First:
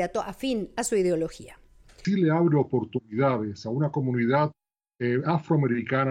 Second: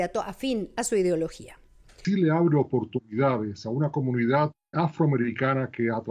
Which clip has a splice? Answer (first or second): second